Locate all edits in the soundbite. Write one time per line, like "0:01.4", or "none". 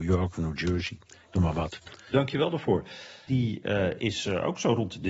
0:02.1
0:03.3